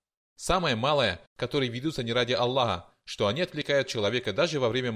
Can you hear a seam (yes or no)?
yes